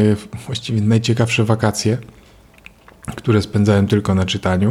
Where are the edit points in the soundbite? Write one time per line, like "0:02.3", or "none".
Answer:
none